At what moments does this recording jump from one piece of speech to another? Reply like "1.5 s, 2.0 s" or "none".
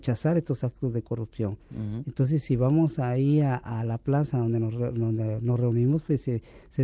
none

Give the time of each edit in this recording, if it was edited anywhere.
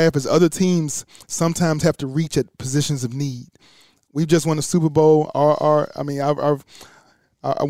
none

